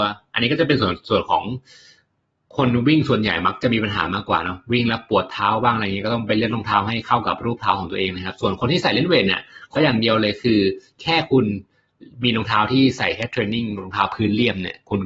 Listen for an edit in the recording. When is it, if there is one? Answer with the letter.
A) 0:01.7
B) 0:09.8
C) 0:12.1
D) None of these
B